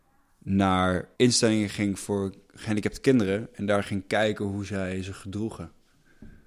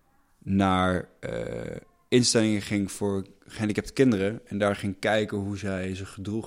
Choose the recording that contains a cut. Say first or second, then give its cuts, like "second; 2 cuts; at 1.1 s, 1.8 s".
first; 1 cut; at 1.1 s